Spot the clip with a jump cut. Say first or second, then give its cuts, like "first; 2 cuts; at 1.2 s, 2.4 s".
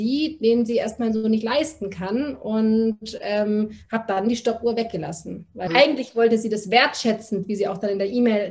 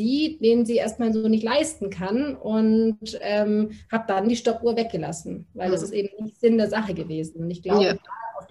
first; 1 cut; at 5.7 s